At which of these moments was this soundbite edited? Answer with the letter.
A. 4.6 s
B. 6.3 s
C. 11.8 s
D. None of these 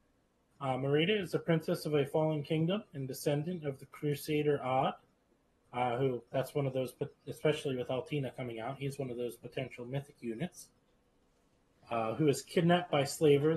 B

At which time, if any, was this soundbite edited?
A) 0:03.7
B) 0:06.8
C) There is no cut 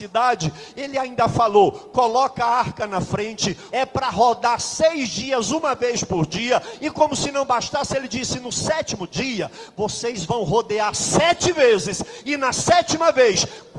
A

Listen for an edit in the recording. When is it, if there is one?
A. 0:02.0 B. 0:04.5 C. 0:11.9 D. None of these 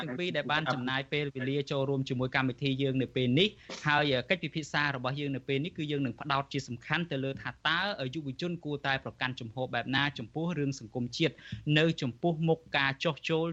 D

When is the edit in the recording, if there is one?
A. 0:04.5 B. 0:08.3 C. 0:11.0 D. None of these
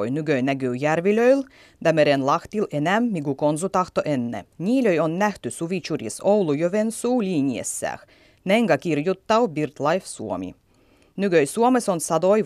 A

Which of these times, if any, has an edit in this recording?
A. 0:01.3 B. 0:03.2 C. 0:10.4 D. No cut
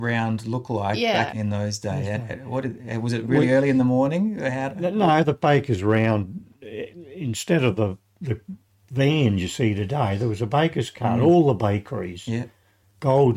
A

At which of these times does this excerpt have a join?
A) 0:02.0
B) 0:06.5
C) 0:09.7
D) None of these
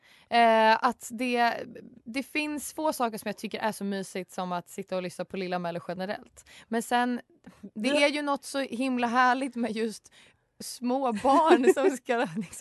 A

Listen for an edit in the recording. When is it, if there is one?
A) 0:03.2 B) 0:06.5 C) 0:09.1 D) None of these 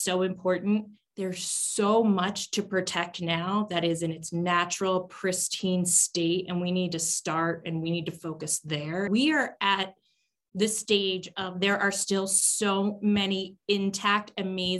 C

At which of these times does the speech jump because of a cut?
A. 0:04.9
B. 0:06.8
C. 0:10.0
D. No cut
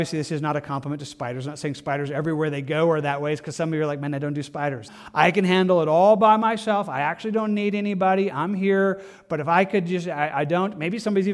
A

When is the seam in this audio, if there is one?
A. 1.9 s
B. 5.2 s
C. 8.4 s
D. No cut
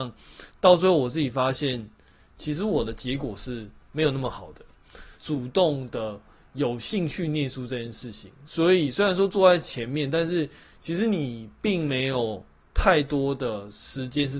B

